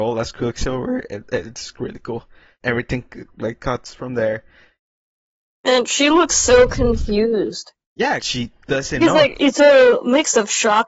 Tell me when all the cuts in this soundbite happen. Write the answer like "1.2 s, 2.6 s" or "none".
2.6 s, 8.2 s, 9.4 s